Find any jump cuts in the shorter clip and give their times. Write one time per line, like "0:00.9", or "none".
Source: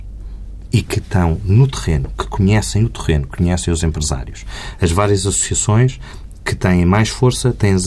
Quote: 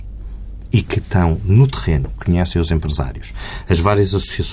0:02.2